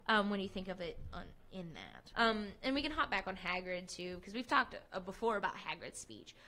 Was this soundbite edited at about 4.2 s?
no; 1 cut; at 2.1 s

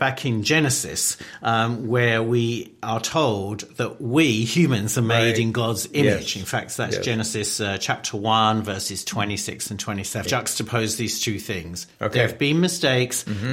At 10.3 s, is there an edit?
yes; 1 cut; at 10.3 s

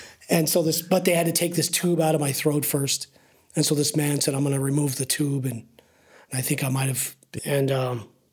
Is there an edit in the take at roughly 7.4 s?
yes; 1 cut; at 7.4 s

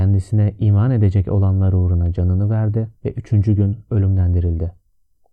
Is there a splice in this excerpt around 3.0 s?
yes; 1 cut; at 3.0 s

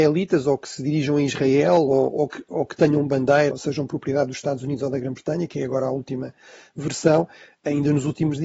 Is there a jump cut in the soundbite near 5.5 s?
no; 1 cut; at 3.5 s

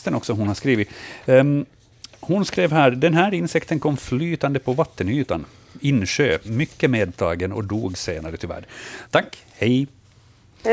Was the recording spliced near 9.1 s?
yes; 1 cut; at 9.1 s

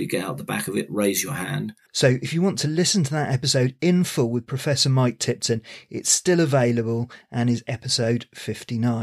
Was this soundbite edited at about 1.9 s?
yes; 1 cut; at 1.9 s

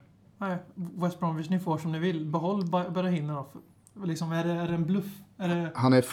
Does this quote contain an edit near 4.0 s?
no; 0 cuts

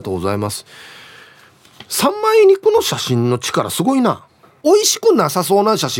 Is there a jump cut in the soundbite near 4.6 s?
yes; 1 cut; at 4.6 s

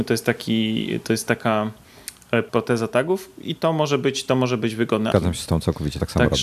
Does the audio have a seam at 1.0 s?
no; 2 cuts; at 2.5 s, 5.1 s

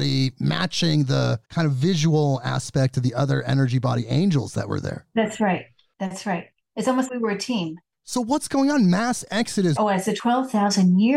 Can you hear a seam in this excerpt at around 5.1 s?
no; 3 cuts; at 1.4 s, 7.1 s, 9.8 s

